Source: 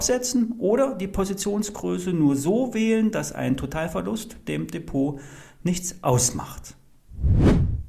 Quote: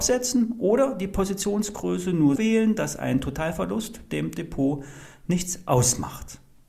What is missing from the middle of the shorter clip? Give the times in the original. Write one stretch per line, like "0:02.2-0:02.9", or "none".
0:02.4-0:02.7